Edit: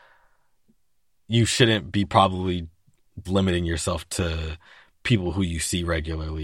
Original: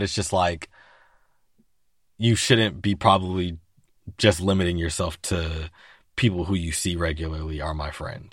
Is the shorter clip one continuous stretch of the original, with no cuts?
no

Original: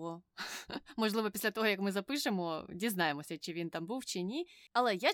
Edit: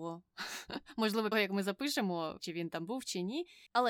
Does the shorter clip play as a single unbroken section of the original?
no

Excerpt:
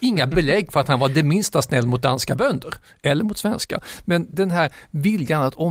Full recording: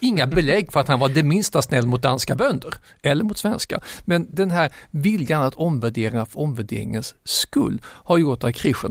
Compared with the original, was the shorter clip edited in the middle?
no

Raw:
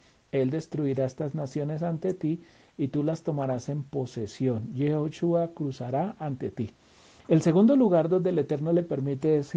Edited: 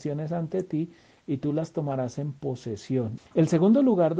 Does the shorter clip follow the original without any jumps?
no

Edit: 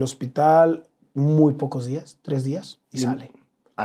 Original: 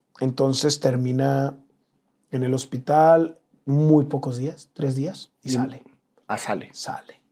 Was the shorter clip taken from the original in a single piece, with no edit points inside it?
yes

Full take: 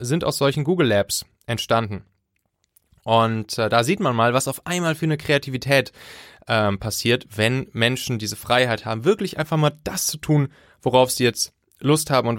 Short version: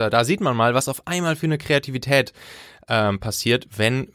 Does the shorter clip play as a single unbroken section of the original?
yes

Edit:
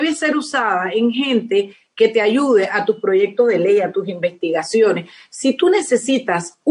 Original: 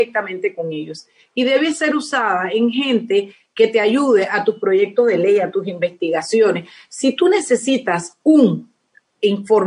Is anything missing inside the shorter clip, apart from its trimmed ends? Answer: no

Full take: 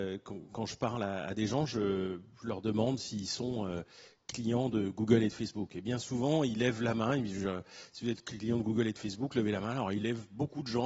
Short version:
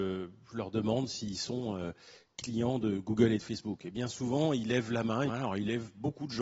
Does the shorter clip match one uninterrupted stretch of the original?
no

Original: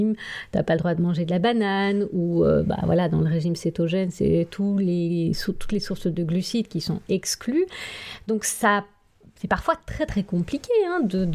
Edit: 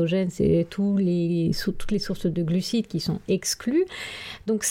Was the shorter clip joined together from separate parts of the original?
no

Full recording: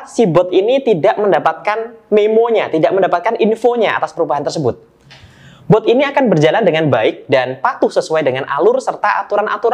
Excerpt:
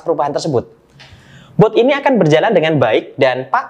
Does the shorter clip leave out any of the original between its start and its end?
no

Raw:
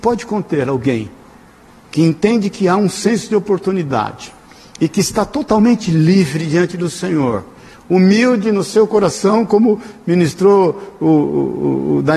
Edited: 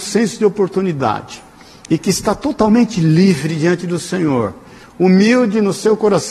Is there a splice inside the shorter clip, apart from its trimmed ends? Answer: no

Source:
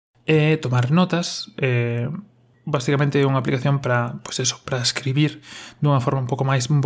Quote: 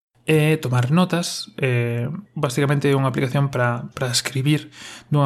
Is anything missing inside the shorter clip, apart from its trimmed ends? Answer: yes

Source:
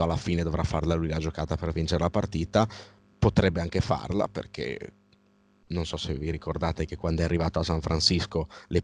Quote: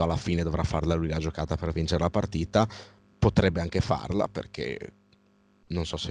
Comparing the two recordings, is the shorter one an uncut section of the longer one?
yes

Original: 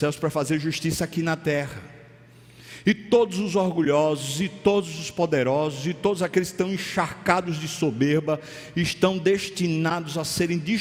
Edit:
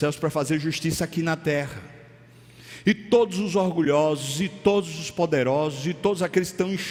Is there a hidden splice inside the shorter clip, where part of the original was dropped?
no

